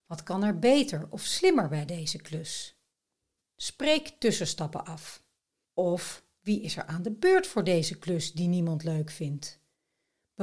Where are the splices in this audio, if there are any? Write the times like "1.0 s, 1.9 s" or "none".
3.4 s, 5.6 s